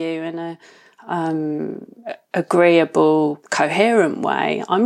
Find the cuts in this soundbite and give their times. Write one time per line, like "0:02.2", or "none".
0:03.4